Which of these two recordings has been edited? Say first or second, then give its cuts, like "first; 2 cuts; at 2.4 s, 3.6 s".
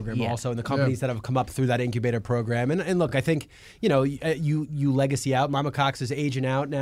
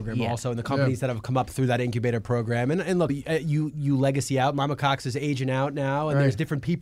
second; 1 cut; at 3.1 s